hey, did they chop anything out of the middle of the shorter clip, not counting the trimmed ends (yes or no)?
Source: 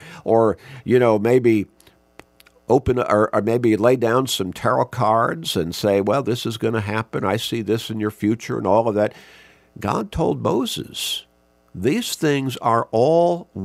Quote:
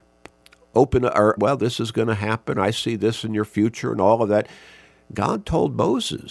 yes